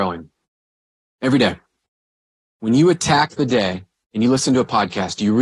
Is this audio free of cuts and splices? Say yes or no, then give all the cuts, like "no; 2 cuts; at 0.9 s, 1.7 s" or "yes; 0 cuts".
yes; 0 cuts